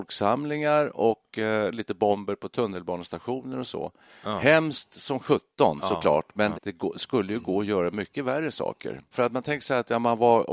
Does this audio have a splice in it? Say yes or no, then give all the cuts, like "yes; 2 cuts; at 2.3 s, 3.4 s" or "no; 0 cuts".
yes; 2 cuts; at 6.5 s, 9.1 s